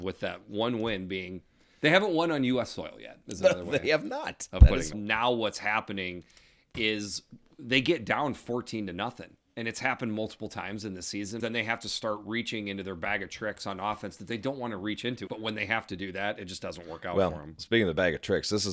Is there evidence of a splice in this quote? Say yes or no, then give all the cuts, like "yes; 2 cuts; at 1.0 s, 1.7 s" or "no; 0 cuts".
yes; 3 cuts; at 4.9 s, 11.4 s, 15.3 s